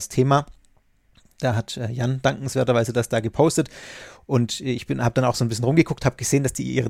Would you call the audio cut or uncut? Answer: uncut